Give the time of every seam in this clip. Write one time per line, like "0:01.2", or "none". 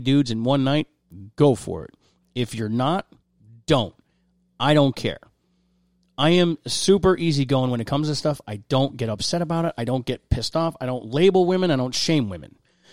none